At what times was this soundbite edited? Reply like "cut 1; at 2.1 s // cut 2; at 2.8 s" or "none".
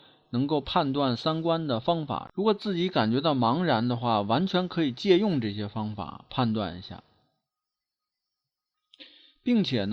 none